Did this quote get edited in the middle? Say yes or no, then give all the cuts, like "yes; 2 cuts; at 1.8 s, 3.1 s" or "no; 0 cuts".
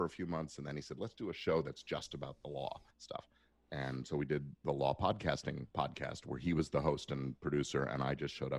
yes; 2 cuts; at 2.9 s, 5.7 s